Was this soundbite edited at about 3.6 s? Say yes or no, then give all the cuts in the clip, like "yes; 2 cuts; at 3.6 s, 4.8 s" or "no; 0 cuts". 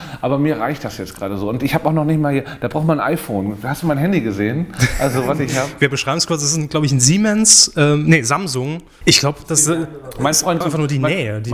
no; 2 cuts; at 9.0 s, 10.6 s